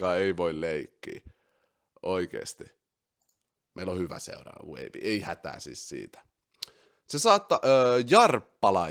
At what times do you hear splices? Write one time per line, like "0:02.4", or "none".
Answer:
0:03.6